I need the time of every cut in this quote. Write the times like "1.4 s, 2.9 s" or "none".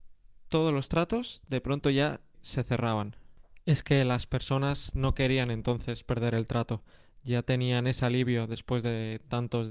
2.3 s